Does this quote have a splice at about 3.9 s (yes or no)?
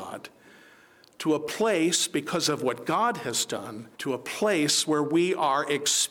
yes